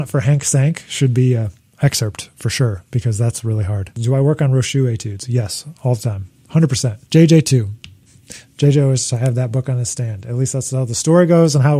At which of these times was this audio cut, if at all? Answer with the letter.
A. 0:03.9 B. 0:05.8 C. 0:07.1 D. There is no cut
C